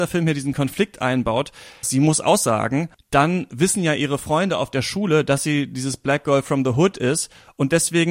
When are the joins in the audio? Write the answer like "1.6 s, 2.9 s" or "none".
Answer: 1.8 s, 2.9 s